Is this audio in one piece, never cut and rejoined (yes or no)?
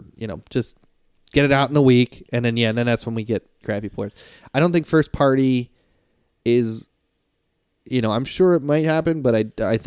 no